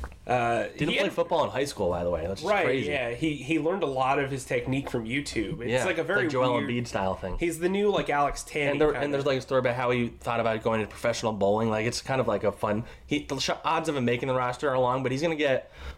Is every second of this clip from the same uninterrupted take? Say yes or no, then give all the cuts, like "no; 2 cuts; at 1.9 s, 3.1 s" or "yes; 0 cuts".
yes; 0 cuts